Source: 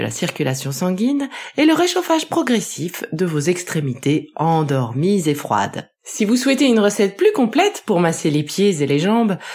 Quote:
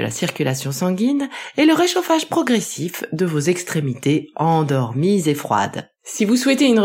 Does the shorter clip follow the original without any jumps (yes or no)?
yes